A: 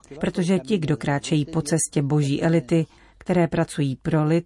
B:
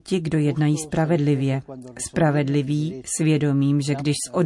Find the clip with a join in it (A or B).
A